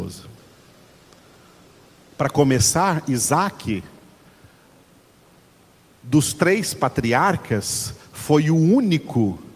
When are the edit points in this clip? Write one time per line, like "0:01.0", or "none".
0:02.1